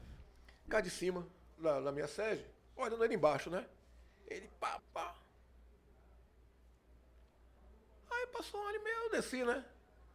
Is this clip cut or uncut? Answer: cut